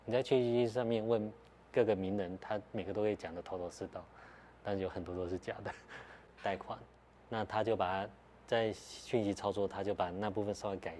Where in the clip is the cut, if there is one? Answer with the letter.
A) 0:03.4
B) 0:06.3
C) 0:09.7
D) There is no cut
B